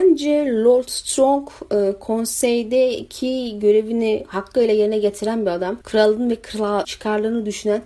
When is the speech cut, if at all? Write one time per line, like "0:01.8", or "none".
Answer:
0:05.8
0:06.8